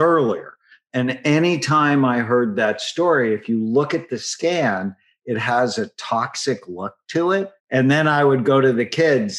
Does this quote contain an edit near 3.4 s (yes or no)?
no